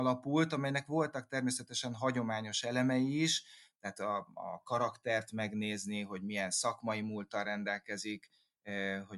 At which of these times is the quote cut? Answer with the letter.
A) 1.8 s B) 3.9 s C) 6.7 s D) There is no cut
D